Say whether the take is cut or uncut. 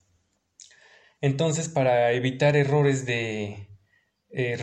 uncut